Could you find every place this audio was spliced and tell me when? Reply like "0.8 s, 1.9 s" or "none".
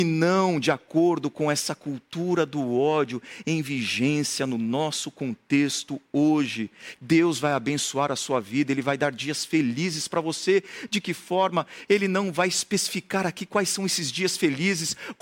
7.0 s